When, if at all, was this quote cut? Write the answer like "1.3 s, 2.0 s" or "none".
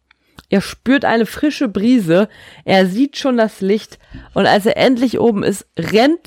none